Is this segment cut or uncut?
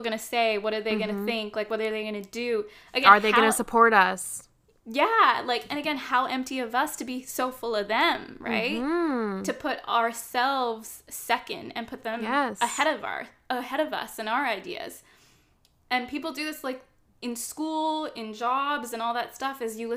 uncut